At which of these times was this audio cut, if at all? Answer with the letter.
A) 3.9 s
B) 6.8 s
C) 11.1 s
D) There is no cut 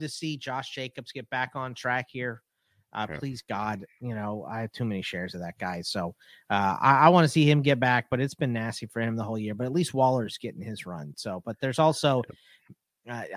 D